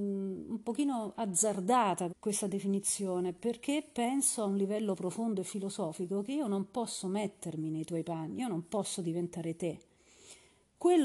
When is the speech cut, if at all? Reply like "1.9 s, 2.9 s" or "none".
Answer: 2.1 s, 5.0 s